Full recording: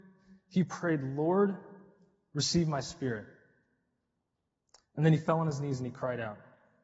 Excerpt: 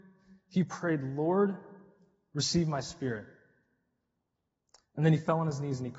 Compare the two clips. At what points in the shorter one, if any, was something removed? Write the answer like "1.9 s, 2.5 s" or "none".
none